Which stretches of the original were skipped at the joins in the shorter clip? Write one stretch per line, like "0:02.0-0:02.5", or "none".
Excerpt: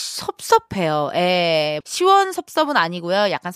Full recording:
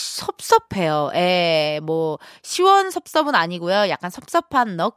0:01.8-0:02.4

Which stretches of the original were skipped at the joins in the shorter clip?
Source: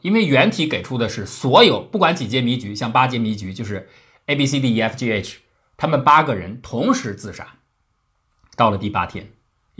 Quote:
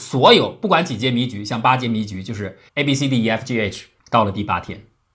0:04.0-0:04.2
0:05.5-0:08.4

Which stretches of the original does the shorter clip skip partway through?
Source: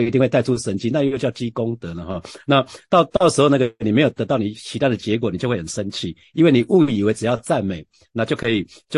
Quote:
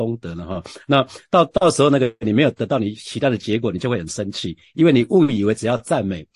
none

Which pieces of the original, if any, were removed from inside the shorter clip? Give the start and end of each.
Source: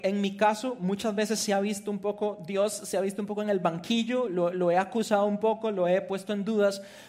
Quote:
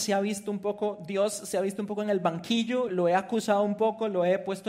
0:04.3-0:04.5

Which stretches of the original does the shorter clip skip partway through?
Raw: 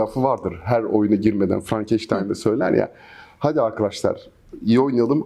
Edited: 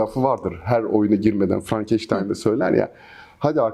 none

